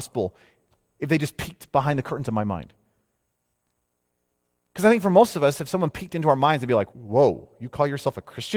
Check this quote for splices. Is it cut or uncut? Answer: cut